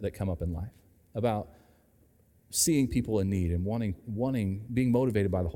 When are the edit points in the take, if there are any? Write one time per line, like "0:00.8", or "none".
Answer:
none